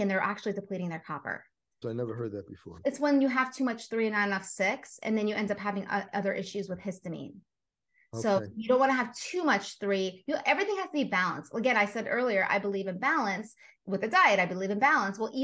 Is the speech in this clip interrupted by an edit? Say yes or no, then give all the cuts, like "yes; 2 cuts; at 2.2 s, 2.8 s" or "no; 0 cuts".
yes; 1 cut; at 1.8 s